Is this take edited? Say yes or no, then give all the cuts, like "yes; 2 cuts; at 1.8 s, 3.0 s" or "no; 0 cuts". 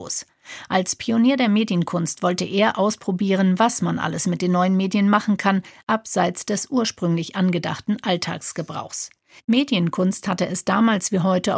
no; 0 cuts